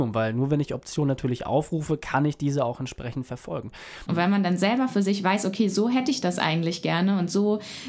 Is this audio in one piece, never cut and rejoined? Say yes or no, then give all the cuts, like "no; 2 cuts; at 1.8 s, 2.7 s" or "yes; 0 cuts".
no; 1 cut; at 4.1 s